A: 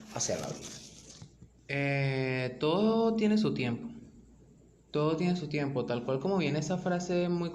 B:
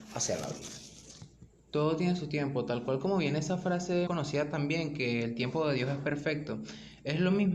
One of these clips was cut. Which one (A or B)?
B